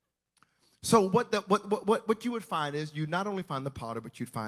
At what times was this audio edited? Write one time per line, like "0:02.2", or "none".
none